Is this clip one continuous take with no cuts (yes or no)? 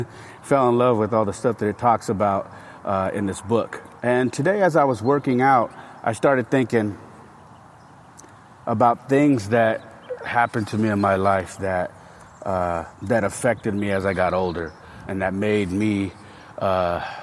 no